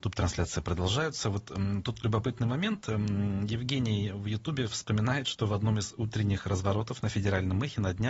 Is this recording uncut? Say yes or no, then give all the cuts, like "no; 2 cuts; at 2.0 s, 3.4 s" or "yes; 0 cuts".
yes; 0 cuts